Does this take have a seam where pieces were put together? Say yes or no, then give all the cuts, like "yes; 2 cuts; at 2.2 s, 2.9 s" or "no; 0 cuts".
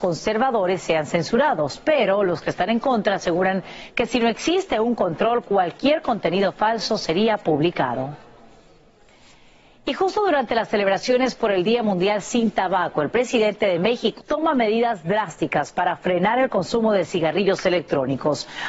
yes; 1 cut; at 14.2 s